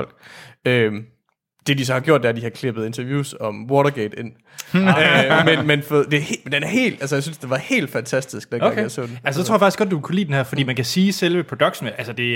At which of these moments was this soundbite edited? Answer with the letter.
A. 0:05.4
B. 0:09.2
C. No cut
A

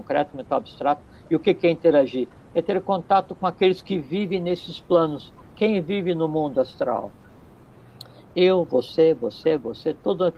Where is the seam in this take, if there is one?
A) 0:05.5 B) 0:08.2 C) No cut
B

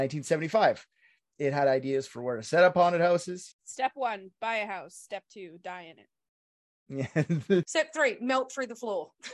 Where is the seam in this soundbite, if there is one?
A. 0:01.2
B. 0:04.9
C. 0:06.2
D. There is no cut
D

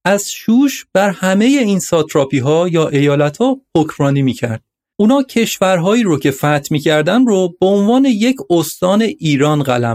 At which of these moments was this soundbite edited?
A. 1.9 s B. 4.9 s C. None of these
B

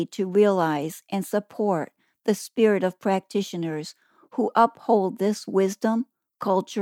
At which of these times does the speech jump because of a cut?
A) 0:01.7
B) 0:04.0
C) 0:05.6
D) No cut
D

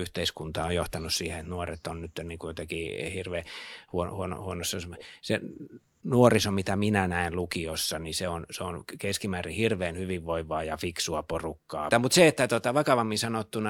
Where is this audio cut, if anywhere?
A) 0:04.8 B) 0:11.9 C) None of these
B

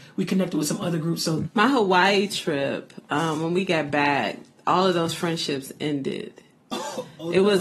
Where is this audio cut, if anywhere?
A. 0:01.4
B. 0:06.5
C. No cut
A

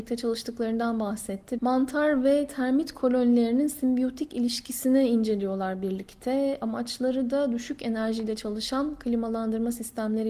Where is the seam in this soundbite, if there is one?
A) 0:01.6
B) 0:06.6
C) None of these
A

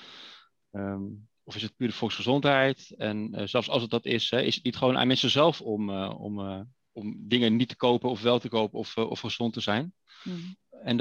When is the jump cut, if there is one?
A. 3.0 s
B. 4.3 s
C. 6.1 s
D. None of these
D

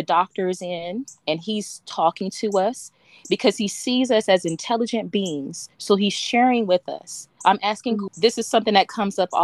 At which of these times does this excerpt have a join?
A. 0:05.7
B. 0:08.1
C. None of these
B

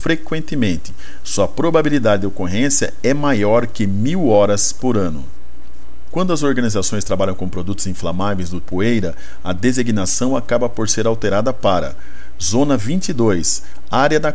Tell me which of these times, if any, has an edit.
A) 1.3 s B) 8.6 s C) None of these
B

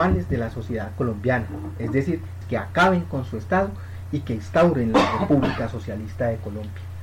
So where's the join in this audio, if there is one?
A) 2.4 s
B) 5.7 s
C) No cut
A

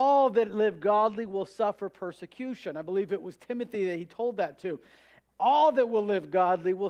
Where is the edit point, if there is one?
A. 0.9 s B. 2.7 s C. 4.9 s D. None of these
D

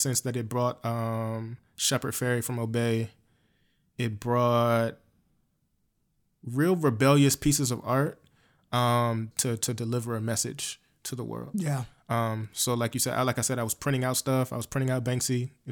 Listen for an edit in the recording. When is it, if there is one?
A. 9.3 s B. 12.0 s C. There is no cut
A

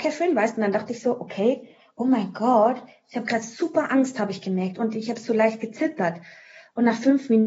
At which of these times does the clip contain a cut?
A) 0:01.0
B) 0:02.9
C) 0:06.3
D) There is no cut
D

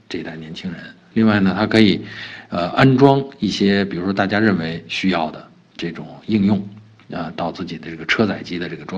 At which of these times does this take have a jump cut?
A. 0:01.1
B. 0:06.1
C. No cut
A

